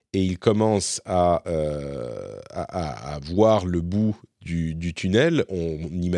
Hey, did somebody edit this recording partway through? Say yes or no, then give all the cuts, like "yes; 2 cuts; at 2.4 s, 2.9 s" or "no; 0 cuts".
no; 0 cuts